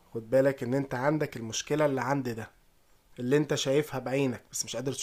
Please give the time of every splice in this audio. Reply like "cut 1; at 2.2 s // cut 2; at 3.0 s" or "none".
none